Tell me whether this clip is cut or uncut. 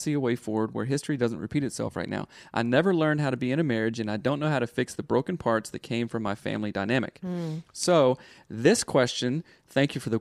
uncut